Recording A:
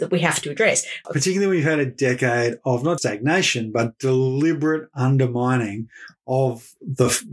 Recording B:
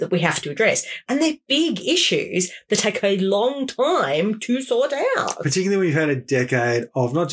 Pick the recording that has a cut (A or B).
A